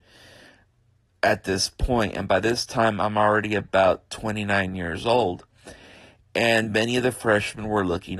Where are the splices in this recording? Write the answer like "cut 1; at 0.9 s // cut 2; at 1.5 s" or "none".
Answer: none